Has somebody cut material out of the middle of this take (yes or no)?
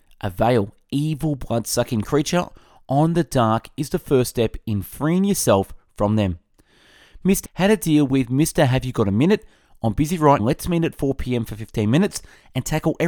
yes